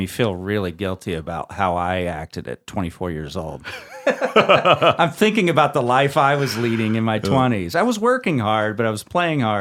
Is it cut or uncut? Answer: uncut